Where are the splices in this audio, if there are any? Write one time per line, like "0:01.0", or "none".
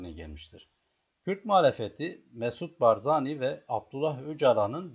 0:01.1

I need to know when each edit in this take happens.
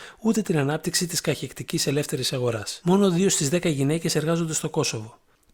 0:02.8

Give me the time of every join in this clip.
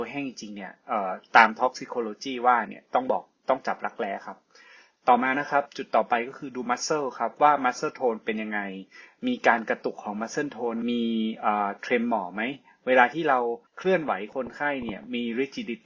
0:10.8
0:13.7

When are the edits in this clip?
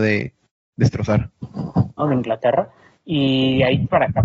0:02.0

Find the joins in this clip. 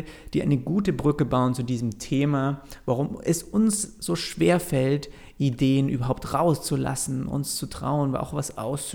none

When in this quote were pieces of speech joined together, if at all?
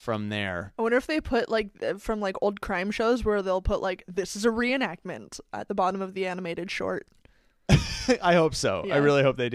none

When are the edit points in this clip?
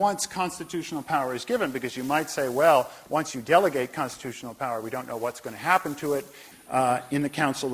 0:06.5

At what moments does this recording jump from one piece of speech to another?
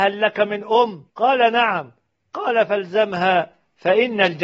0:01.1

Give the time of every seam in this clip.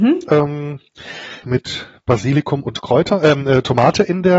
0:01.4

